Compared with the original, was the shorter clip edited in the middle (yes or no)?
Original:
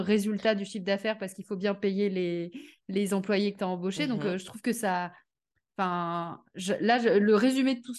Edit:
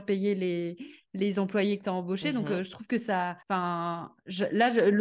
yes